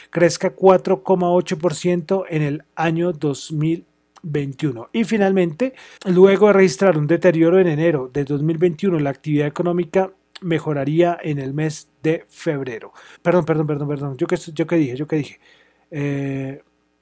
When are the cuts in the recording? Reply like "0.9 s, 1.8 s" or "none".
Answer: 6.0 s, 13.2 s